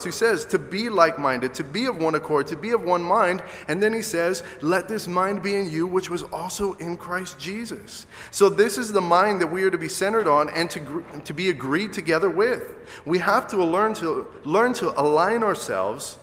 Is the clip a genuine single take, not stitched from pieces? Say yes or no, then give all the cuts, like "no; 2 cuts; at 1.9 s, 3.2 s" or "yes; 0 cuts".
yes; 0 cuts